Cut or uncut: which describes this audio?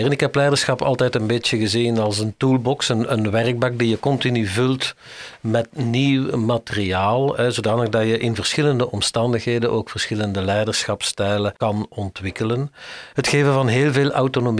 cut